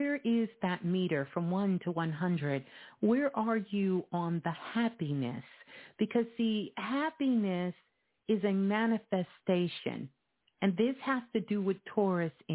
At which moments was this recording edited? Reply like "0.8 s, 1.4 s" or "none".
none